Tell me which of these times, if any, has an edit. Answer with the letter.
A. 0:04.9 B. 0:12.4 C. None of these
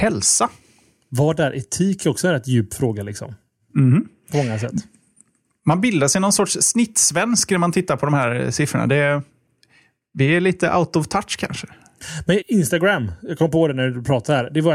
B